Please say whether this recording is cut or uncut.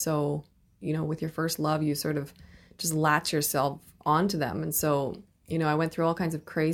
uncut